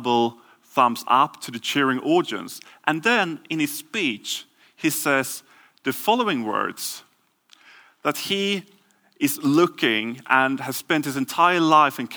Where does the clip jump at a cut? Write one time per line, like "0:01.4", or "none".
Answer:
none